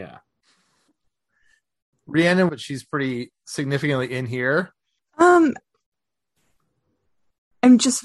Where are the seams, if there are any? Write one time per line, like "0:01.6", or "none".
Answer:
0:02.5
0:05.0